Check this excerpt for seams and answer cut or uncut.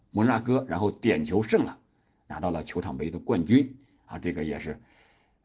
uncut